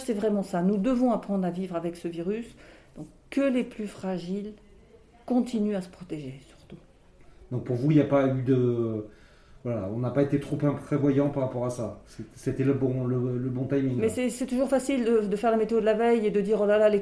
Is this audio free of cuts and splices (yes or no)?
yes